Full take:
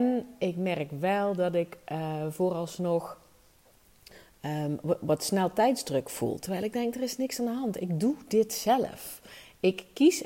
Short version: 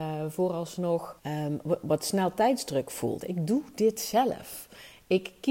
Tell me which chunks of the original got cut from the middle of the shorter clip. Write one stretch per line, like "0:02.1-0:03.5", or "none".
0:03.2-0:04.4
0:06.4-0:07.7